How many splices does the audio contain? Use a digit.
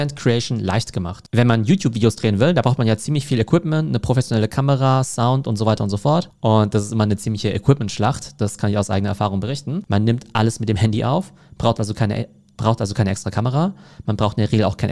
2